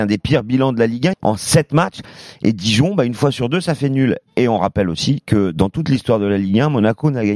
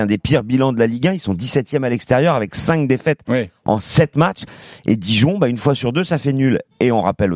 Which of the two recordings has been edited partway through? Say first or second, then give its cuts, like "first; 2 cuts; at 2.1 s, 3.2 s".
first; 1 cut; at 1.1 s